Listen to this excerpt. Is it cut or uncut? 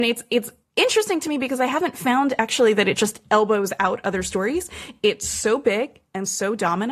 uncut